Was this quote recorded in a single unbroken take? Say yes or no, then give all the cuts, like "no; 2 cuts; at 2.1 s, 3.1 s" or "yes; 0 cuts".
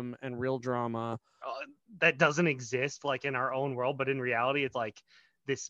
no; 2 cuts; at 1.4 s, 4.7 s